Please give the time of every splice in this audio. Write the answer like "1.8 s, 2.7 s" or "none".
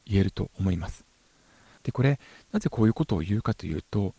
1.8 s